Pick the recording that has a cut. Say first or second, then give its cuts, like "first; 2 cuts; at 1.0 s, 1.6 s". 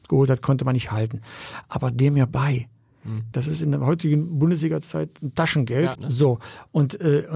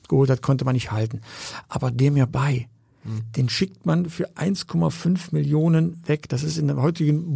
first; 2 cuts; at 3.3 s, 5.9 s